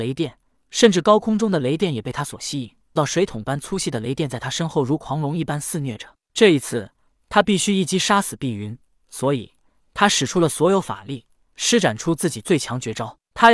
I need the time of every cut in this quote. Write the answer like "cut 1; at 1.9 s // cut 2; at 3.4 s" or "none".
cut 1; at 3.0 s